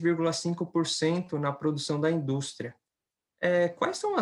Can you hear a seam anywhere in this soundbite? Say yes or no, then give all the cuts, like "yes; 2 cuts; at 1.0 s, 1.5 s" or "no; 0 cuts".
no; 0 cuts